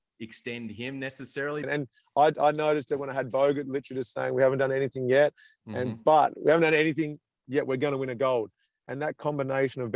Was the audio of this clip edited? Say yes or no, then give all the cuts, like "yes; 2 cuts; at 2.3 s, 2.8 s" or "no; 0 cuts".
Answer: yes; 1 cut; at 1.6 s